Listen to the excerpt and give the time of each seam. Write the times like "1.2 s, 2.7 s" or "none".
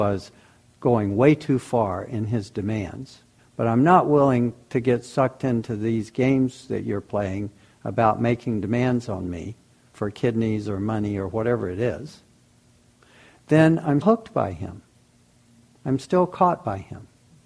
3.4 s, 14.0 s